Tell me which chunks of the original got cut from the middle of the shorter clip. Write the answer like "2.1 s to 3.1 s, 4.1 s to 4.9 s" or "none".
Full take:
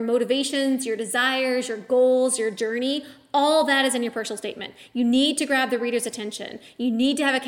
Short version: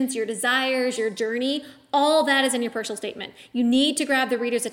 1.7 s to 2.4 s